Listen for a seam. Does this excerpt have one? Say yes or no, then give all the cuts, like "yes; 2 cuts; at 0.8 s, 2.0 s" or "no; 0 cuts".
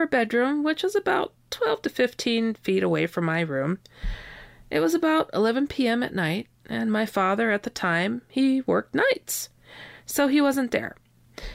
no; 0 cuts